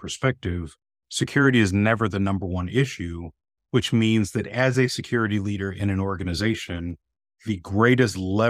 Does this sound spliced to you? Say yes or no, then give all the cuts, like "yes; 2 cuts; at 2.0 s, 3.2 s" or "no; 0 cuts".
no; 0 cuts